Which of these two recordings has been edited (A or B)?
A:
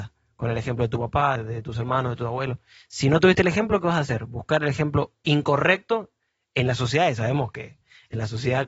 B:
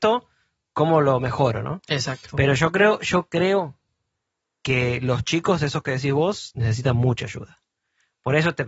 A